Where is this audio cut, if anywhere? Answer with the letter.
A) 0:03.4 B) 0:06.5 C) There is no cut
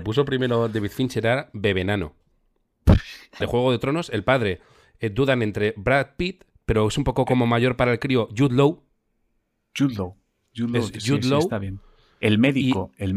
A